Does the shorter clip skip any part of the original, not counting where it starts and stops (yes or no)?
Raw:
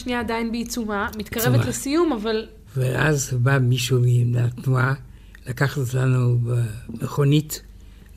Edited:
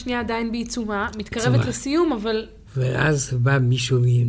no